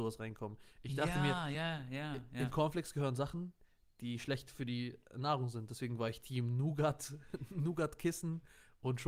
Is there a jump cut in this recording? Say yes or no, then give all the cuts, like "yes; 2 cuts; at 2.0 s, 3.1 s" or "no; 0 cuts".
no; 0 cuts